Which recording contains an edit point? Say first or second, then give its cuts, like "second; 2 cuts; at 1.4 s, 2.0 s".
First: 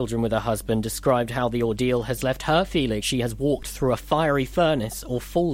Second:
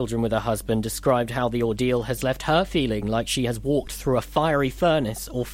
first; 1 cut; at 3.0 s